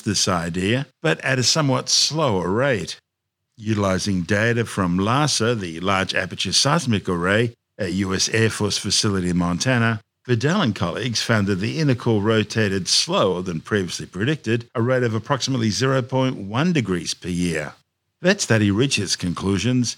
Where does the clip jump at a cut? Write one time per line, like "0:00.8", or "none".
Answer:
none

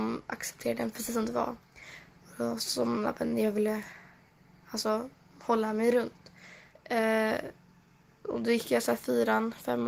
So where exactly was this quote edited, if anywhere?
0:06.7

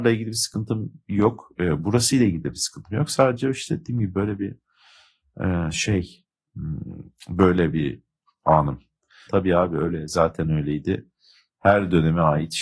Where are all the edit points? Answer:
0:09.3
0:11.5

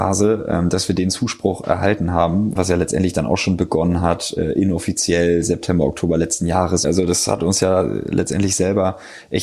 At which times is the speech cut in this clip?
0:02.6
0:06.8

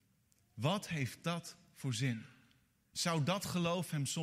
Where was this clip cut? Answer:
0:02.9

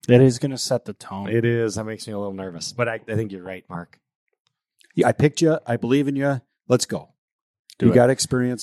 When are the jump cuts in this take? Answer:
none

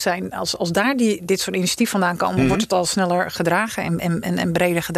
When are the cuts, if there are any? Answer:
none

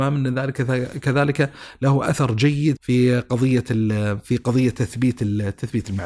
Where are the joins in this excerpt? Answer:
0:02.8

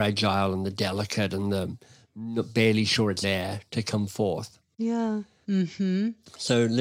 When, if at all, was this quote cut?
0:03.2
0:05.4

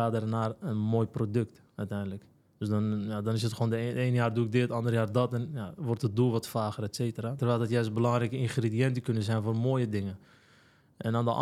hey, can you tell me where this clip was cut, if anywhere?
0:07.4

